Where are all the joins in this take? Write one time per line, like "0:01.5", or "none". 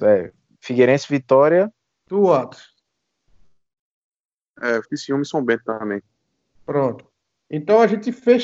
0:02.1
0:04.8